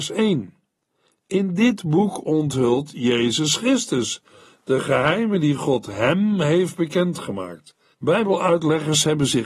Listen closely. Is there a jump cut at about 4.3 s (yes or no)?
no